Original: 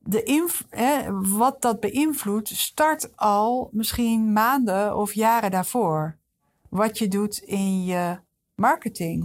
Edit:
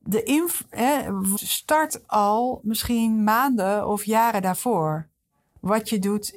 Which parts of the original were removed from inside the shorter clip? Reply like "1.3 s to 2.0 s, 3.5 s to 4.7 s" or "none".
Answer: 1.4 s to 2.4 s